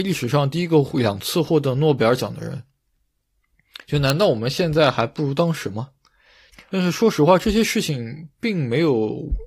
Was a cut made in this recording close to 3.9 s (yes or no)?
no